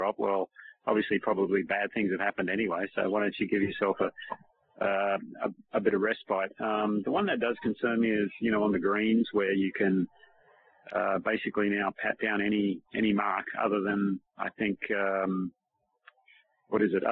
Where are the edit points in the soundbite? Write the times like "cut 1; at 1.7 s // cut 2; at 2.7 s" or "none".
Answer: cut 1; at 12.9 s